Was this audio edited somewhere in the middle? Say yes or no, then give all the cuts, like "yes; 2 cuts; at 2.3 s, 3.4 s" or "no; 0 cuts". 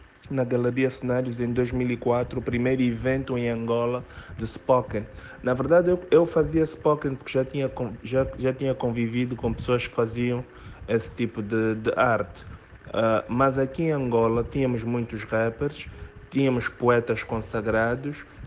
no; 0 cuts